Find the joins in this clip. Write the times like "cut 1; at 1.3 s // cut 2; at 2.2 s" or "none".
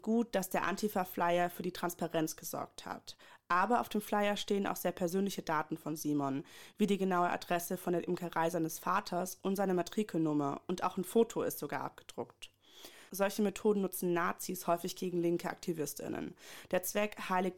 none